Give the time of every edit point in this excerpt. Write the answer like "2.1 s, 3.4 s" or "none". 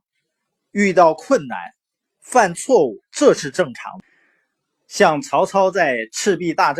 none